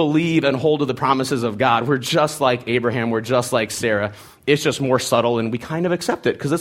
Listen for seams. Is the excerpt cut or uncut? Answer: uncut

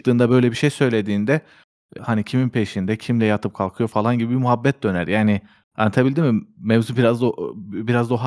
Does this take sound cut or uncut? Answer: cut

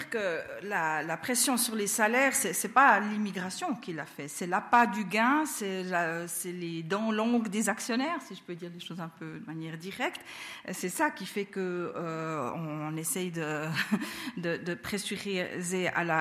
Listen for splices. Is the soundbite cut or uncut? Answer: uncut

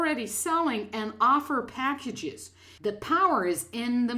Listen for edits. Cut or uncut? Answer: cut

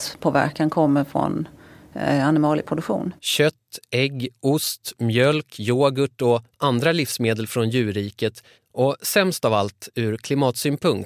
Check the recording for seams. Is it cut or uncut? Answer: cut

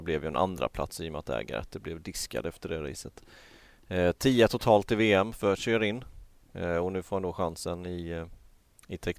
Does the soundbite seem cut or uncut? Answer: uncut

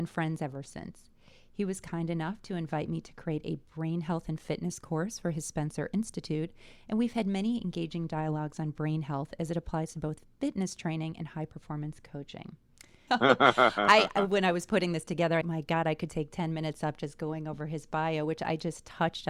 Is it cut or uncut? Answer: cut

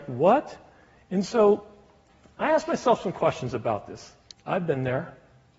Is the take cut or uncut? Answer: cut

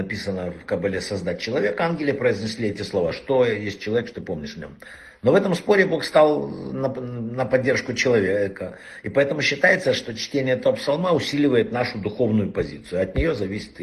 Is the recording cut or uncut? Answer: uncut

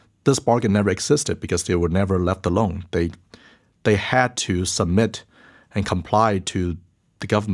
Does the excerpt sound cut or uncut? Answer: uncut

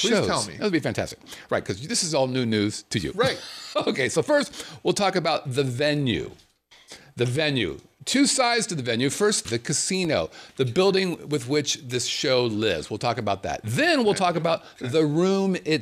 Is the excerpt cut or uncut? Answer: cut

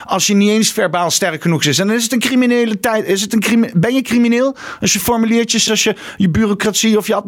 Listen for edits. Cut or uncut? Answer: cut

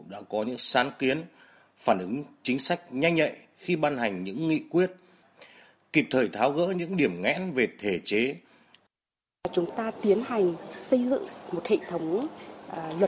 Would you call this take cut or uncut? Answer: uncut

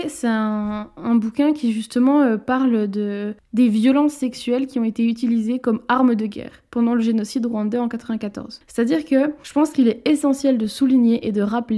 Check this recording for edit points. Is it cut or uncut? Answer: uncut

